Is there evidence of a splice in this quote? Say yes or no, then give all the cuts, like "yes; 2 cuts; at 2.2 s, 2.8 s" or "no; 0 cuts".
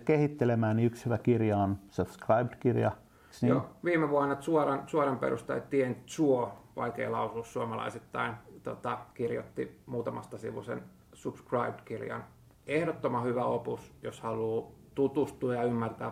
no; 0 cuts